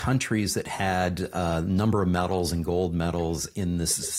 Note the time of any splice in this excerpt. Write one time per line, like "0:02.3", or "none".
none